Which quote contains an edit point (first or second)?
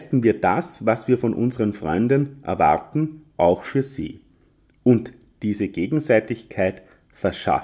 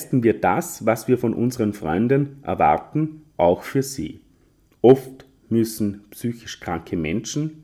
second